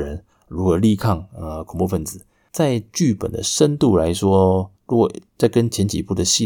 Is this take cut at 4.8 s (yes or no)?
yes